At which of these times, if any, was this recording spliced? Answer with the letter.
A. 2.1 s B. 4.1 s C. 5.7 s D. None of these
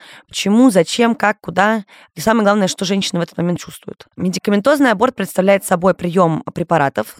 B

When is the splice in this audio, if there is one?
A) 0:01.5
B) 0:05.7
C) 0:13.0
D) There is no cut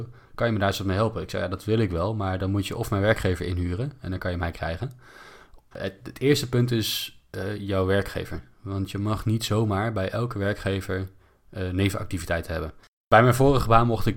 B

